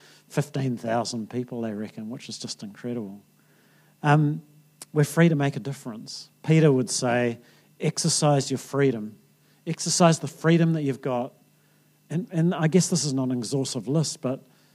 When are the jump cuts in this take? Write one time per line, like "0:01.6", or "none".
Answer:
none